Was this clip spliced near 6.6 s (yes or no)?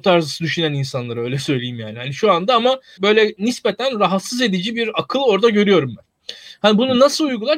no